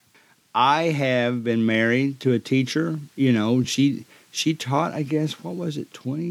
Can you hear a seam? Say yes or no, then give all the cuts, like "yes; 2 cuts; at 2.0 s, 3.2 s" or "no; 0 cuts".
no; 0 cuts